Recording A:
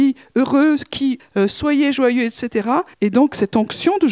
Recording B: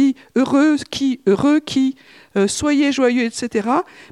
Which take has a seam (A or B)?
A